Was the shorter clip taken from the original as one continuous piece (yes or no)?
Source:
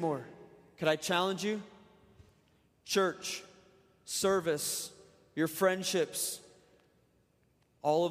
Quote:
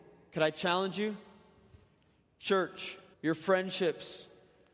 no